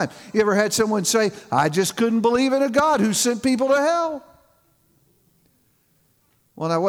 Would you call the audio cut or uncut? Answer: uncut